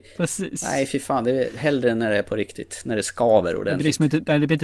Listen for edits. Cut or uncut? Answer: uncut